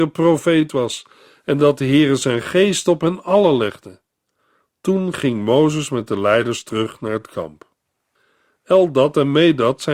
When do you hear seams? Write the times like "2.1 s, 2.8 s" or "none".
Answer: none